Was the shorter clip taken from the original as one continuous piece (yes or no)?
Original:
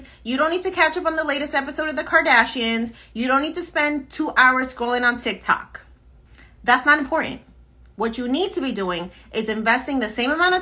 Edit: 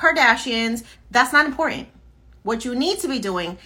no